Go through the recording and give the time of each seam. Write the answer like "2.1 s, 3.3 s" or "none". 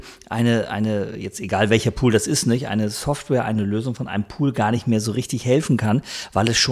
none